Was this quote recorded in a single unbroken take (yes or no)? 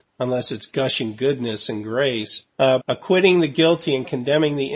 no